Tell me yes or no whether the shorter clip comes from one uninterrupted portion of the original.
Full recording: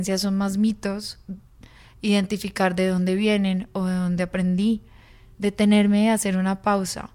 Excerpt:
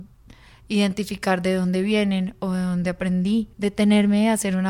no